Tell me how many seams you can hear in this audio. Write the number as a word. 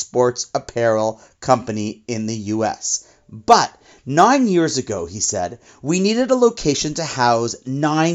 zero